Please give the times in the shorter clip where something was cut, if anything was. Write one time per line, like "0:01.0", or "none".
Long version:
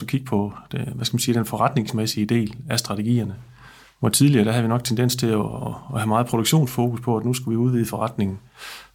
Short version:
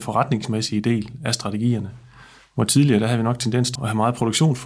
0:03.8